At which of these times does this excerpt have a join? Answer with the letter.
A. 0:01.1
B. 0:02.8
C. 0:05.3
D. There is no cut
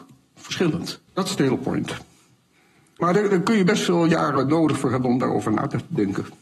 A